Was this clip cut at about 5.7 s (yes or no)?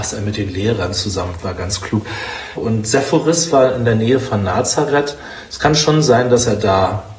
no